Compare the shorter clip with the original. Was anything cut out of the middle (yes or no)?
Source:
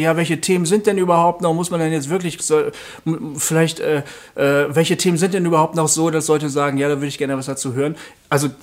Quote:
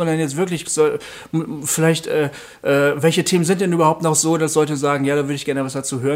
no